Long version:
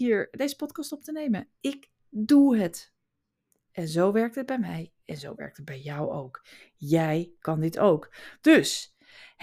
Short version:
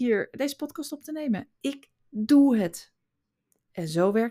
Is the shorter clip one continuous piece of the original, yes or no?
yes